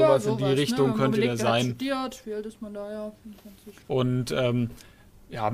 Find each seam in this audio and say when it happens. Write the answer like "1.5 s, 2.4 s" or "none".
3.9 s